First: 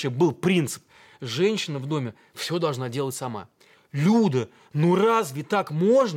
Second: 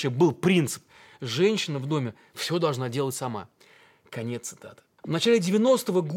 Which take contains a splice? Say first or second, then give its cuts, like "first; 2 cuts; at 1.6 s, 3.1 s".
first; 1 cut; at 3.7 s